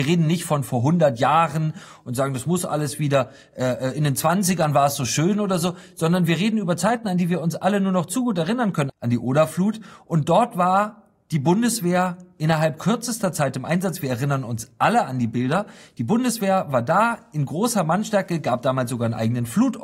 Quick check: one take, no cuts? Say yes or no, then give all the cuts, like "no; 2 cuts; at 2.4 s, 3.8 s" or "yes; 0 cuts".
no; 1 cut; at 8.9 s